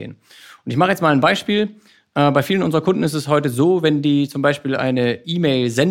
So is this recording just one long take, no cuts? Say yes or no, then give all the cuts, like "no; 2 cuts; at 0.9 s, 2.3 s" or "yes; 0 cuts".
yes; 0 cuts